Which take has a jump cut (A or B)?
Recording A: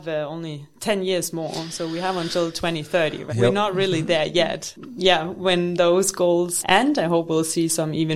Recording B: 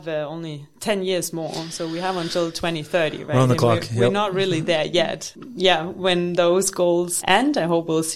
A